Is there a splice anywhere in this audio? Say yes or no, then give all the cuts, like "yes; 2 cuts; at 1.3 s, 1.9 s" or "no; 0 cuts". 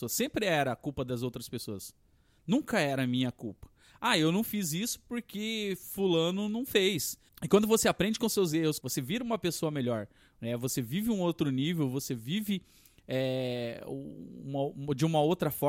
yes; 2 cuts; at 7.3 s, 8.8 s